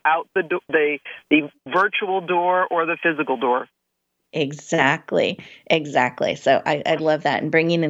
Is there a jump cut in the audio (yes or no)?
no